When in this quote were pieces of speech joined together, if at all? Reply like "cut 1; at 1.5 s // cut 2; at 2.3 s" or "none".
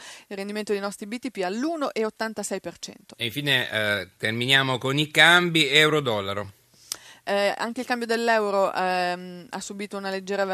none